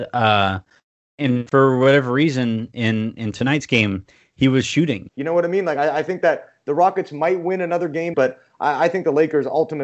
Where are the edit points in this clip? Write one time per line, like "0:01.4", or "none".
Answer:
0:05.1
0:08.1

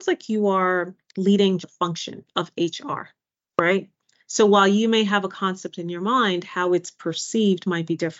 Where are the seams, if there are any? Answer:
0:01.6

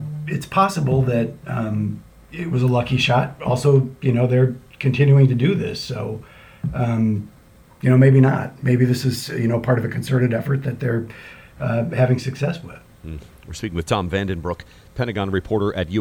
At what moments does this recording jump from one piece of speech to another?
none

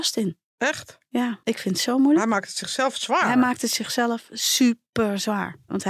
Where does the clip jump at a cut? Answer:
0:01.4

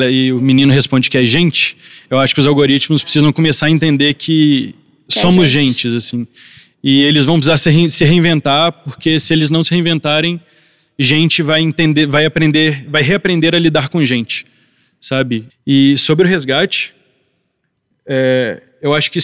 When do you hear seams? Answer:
0:15.5

